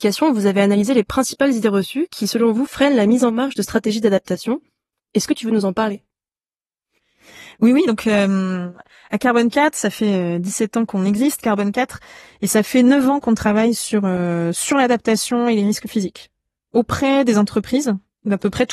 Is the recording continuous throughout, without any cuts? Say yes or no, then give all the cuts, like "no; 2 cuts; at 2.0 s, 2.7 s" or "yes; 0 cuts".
yes; 0 cuts